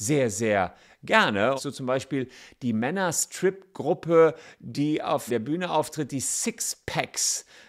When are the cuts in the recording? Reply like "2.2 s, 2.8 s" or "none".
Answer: 1.6 s, 5.3 s